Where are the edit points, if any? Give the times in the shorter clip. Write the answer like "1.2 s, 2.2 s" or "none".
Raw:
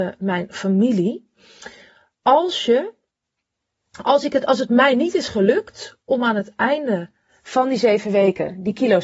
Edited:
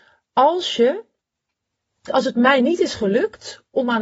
2.1 s